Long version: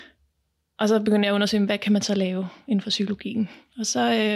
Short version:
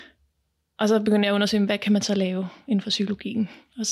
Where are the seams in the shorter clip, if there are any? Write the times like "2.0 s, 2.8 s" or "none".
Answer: none